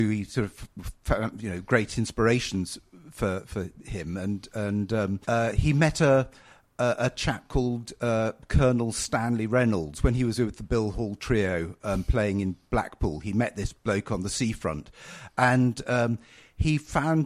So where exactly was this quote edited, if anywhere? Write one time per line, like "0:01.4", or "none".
0:05.2